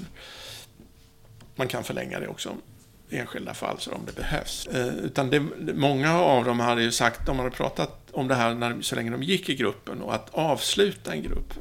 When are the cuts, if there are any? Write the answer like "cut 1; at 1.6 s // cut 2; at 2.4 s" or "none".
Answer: cut 1; at 4.7 s